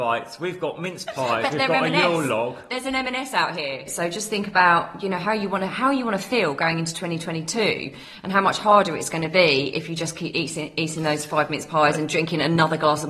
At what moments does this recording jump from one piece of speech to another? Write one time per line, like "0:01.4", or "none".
0:03.9

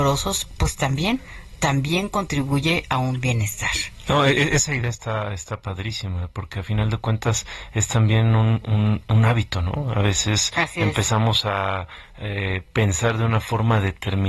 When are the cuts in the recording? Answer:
none

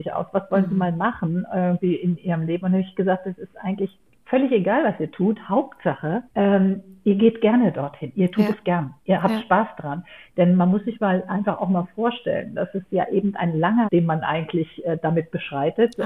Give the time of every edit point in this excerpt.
0:06.3
0:13.9

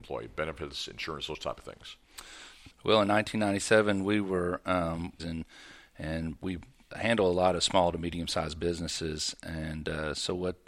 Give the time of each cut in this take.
0:02.7
0:05.2
0:06.9

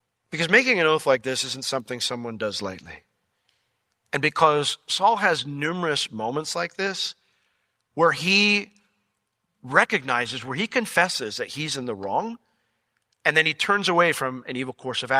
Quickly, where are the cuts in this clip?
none

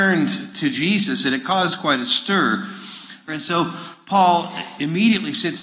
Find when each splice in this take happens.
0:03.3

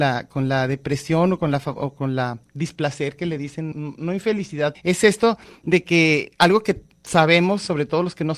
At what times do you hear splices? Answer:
0:03.7
0:04.7

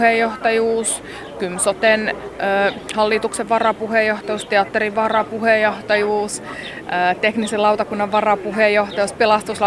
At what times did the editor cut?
none

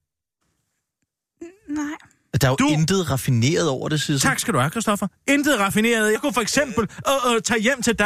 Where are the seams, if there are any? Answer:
0:06.2

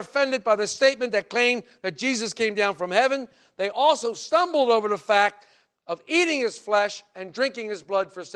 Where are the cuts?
none

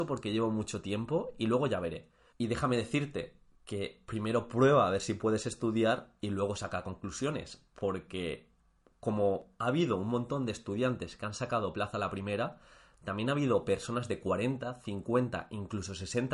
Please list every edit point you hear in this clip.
0:02.3

